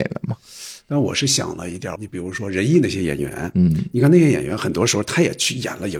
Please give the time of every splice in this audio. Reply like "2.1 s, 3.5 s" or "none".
2.0 s